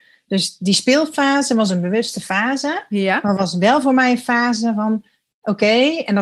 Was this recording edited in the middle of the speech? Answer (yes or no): no